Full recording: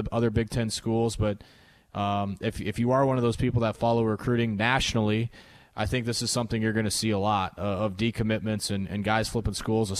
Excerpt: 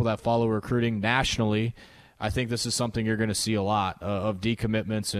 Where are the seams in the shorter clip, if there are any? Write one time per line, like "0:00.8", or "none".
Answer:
none

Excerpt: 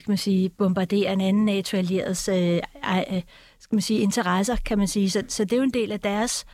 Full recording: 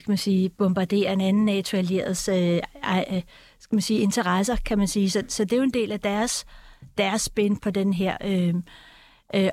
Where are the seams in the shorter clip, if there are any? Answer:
none

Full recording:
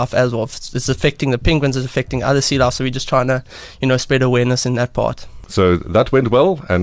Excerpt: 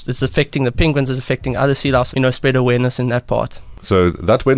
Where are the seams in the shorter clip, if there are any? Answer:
0:02.1

